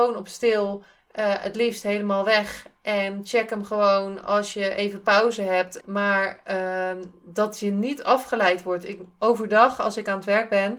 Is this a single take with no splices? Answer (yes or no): no